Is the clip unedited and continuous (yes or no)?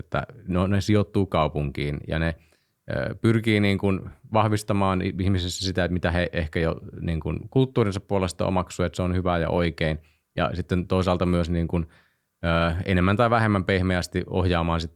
yes